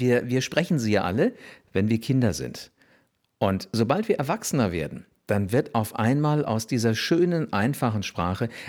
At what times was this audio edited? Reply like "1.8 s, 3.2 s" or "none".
none